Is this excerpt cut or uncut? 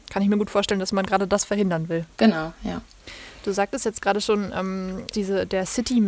cut